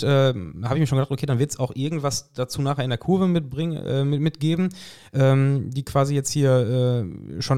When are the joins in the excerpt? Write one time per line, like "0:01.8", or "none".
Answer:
none

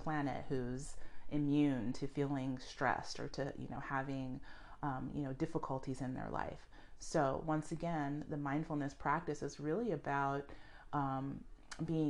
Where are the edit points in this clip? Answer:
none

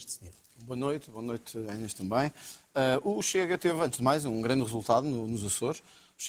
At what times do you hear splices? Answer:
none

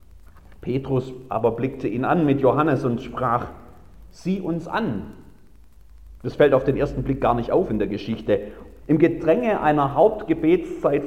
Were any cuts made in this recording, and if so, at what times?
0:06.2
0:08.8

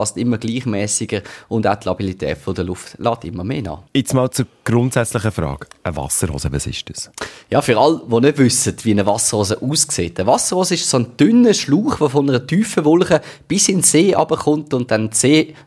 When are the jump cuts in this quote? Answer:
0:03.9

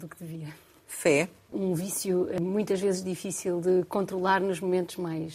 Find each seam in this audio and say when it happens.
0:01.5

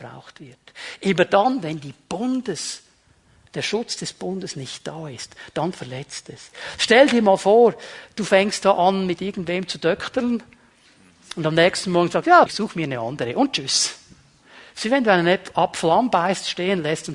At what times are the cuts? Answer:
0:12.5

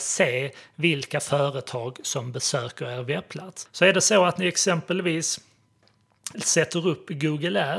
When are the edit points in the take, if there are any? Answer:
0:03.7
0:06.3

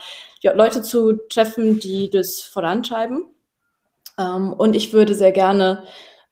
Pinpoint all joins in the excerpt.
none

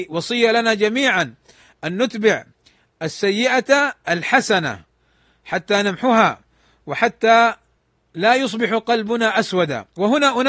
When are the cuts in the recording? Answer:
none

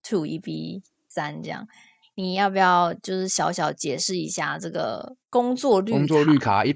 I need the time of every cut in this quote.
0:02.0

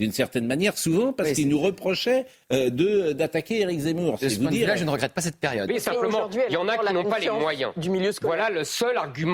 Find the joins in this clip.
0:05.7

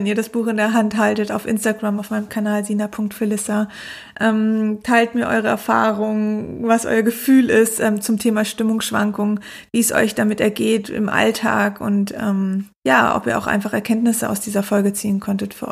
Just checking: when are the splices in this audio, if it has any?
0:12.8

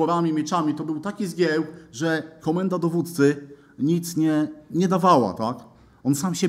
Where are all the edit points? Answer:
none

